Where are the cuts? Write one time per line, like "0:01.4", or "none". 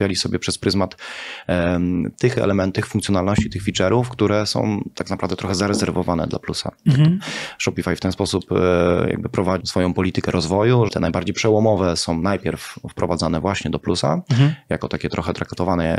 0:09.6
0:10.9